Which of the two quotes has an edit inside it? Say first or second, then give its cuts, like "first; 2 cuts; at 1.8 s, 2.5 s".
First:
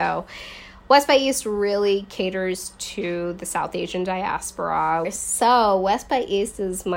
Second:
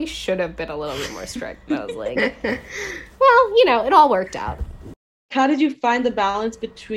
first; 1 cut; at 5.0 s